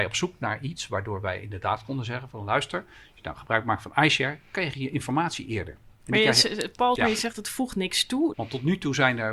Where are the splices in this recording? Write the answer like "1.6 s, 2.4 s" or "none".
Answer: 7.0 s, 8.3 s